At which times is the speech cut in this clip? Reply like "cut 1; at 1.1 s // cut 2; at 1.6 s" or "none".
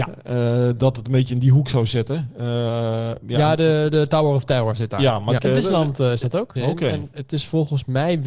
cut 1; at 5.4 s // cut 2; at 6.6 s